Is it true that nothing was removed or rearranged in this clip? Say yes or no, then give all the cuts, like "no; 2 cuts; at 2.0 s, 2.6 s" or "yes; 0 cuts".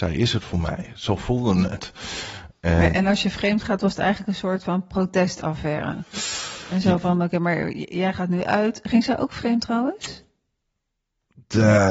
yes; 0 cuts